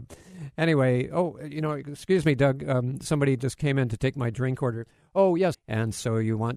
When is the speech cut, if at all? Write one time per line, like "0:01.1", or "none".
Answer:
0:05.5